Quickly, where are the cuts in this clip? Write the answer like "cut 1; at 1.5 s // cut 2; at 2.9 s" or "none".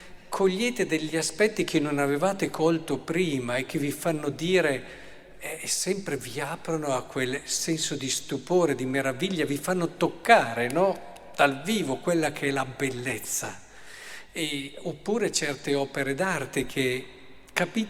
none